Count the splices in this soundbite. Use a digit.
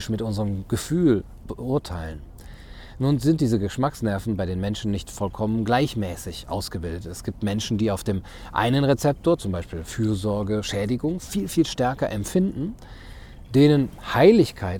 0